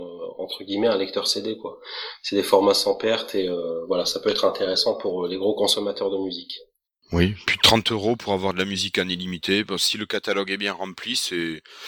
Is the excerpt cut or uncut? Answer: uncut